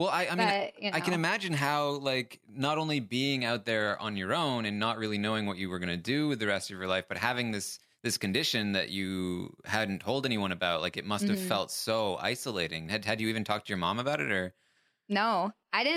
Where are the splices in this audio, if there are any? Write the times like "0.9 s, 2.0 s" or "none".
none

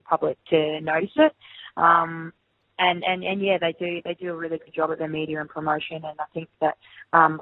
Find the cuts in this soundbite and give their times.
none

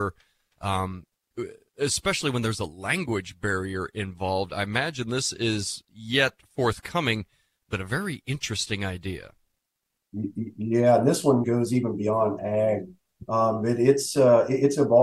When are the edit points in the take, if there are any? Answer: 11.4 s

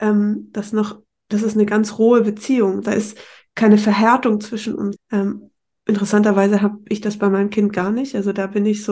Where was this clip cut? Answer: 2.8 s, 5.0 s

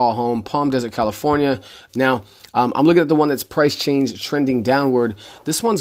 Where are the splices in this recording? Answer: 1.9 s

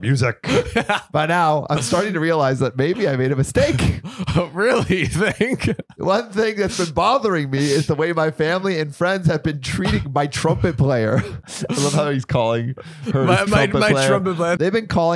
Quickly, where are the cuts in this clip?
none

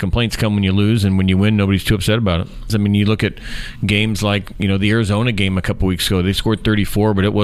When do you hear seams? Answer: 2.7 s

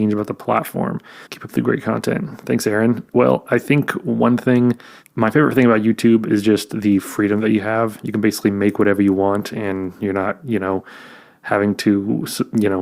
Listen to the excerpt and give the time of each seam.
1.3 s

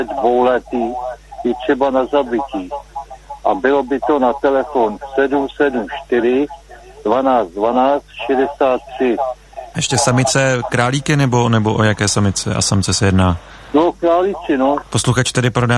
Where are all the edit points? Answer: 9.7 s, 14.8 s

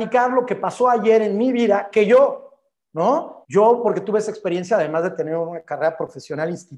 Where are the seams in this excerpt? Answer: 3.4 s

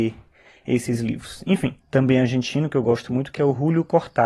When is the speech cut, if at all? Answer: 1.8 s

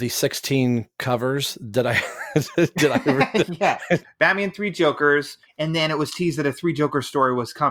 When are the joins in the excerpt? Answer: 4.0 s, 5.4 s

